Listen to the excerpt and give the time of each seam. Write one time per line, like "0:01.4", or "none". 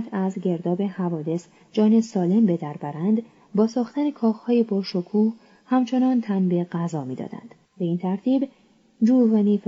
0:07.6